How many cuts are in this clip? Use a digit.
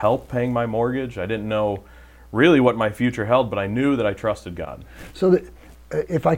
0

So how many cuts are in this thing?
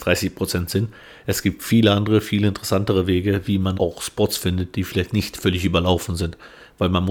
1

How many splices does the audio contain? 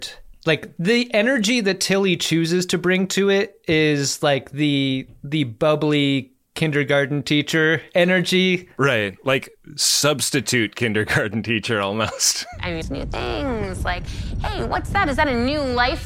1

